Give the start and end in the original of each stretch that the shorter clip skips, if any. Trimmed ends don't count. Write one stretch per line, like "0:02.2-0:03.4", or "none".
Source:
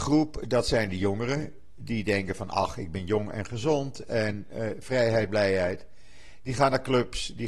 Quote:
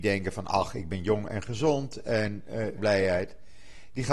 0:04.8-0:05.3